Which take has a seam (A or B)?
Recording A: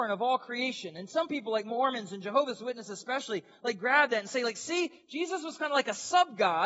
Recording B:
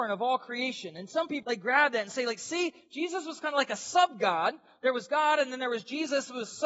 B